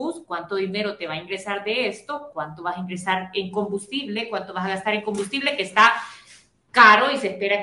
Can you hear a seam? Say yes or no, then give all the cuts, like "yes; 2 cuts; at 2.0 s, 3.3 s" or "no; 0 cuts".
yes; 1 cut; at 2.3 s